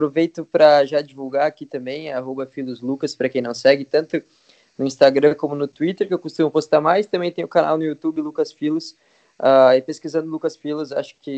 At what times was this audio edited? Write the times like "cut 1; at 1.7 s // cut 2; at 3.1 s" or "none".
none